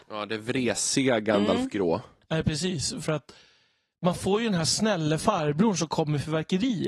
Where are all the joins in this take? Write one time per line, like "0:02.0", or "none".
0:03.0